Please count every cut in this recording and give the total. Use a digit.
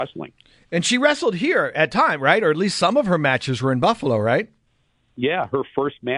0